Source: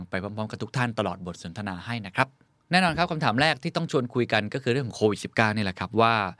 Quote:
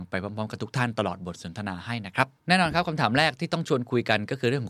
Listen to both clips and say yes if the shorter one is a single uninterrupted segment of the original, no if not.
no